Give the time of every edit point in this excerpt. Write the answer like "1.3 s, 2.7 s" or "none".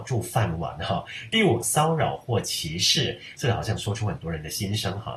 1.6 s, 3.3 s

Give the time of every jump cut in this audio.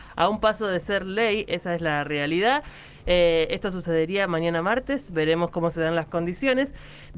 none

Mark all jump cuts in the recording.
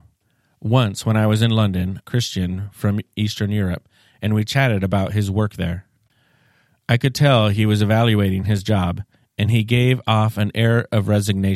2.0 s

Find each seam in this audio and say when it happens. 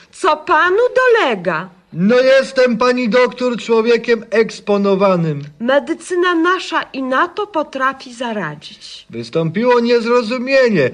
none

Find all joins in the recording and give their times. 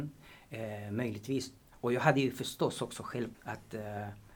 3.3 s

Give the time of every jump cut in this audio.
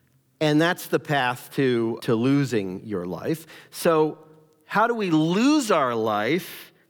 2.0 s

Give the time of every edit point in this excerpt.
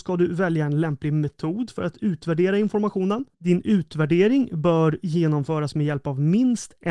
3.3 s

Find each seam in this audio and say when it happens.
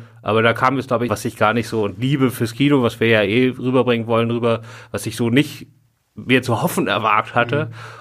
1.1 s

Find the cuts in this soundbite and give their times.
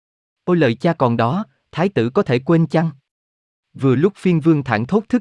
3.5 s

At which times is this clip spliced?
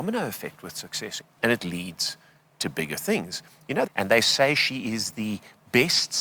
1.2 s, 3.9 s

